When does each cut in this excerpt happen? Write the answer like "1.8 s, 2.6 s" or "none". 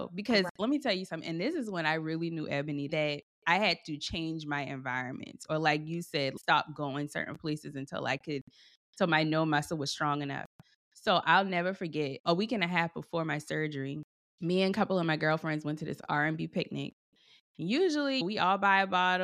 none